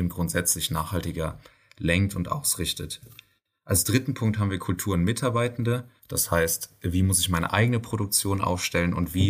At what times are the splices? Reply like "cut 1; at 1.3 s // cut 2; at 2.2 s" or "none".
cut 1; at 6.0 s